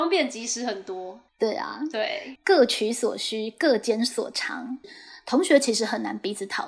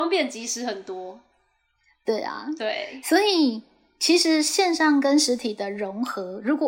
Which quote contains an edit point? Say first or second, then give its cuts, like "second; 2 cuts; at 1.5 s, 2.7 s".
first; 3 cuts; at 1.3 s, 2.3 s, 4.8 s